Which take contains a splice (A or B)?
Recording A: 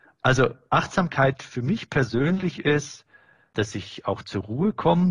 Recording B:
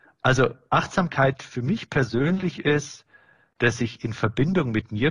A